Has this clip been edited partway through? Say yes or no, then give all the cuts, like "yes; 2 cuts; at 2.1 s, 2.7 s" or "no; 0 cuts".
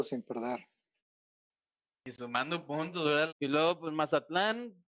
yes; 1 cut; at 3.3 s